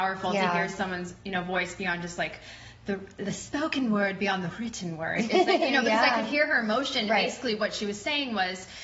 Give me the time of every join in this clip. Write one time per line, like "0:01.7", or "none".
none